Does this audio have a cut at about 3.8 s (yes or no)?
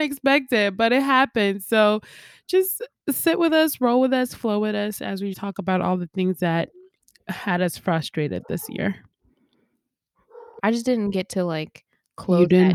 no